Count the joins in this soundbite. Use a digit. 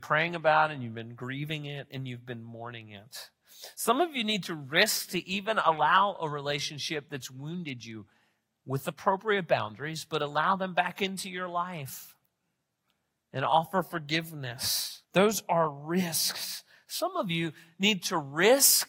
1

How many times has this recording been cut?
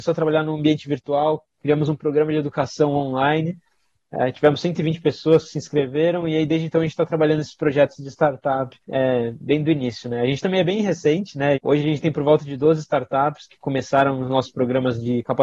2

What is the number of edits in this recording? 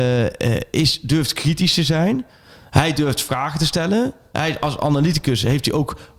0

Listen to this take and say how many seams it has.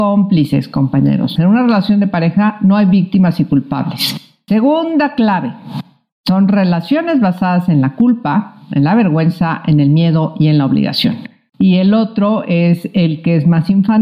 3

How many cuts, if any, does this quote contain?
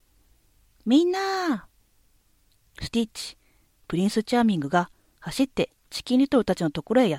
1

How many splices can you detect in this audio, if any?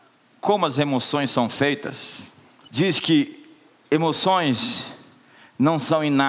1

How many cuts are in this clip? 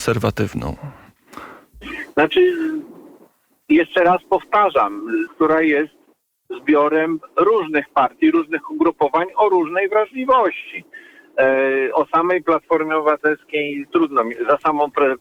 1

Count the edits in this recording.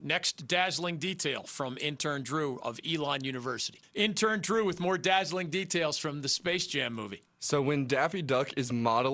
1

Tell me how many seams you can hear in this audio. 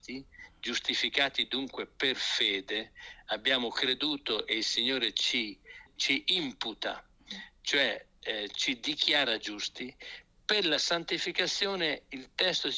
0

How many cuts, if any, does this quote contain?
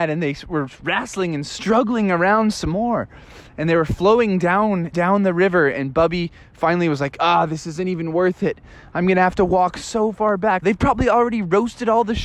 2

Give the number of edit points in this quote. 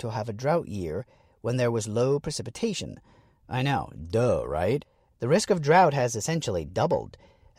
1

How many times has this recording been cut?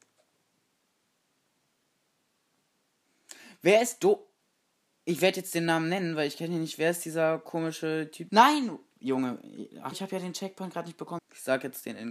3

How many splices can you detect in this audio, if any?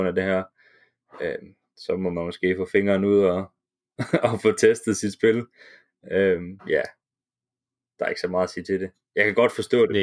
1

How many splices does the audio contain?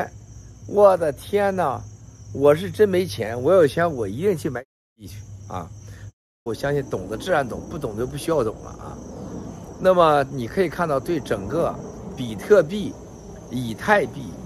1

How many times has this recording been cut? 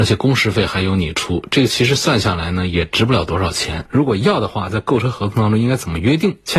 1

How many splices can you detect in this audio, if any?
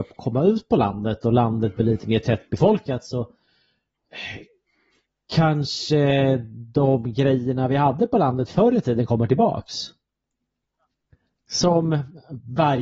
0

